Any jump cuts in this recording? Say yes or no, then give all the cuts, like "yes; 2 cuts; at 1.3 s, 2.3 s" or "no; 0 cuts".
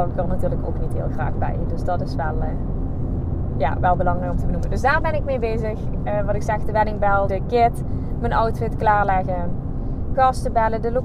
yes; 2 cuts; at 7.3 s, 10.1 s